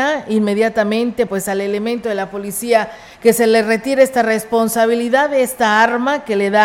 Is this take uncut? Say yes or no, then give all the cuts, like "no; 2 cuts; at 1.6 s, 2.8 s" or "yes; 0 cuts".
yes; 0 cuts